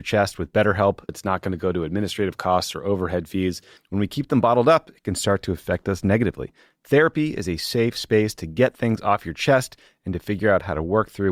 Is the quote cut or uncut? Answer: cut